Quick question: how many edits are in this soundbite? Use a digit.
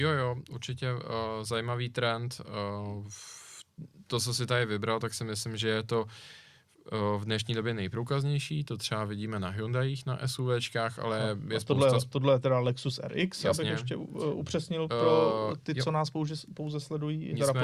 0